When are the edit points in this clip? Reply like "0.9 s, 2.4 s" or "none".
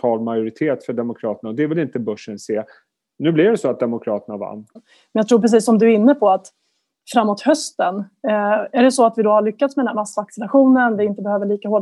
4.8 s